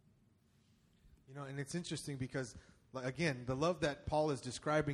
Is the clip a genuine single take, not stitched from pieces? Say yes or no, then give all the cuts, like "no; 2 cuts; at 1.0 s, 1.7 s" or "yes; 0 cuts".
yes; 0 cuts